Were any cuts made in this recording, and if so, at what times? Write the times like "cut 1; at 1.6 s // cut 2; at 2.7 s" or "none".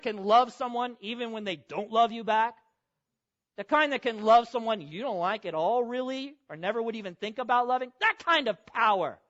none